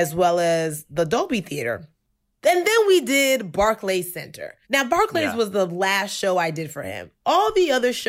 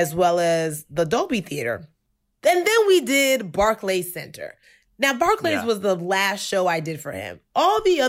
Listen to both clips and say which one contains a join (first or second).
first